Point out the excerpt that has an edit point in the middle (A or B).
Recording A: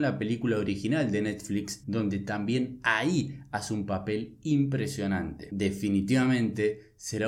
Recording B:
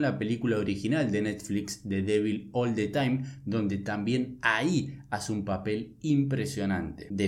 A